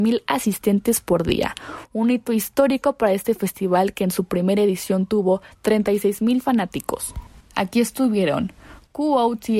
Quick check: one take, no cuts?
no; 1 cut; at 7.4 s

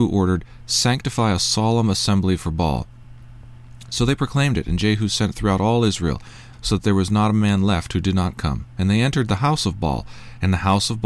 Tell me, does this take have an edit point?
yes; 1 cut; at 6.5 s

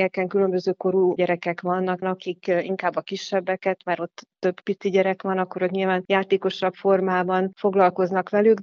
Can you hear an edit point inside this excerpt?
yes; 1 cut; at 2.0 s

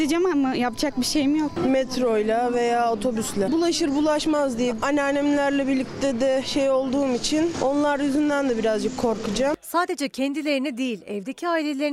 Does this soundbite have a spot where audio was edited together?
no; 0 cuts

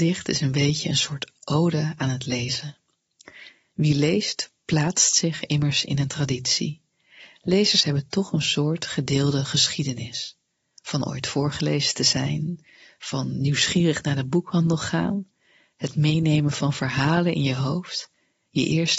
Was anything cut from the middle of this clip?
no; 0 cuts

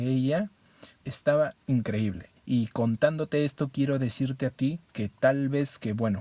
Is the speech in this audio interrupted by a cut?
yes; 3 cuts; at 1.0 s, 2.4 s, 4.8 s

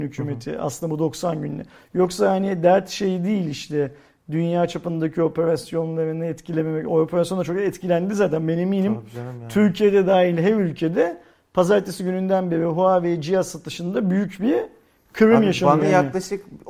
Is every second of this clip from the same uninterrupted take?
no; 1 cut; at 15.8 s

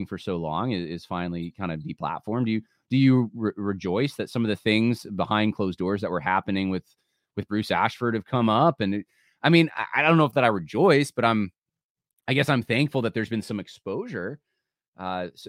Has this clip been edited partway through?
no; 0 cuts

